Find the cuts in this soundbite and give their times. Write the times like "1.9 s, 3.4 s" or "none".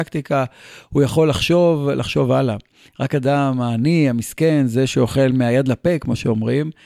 2.9 s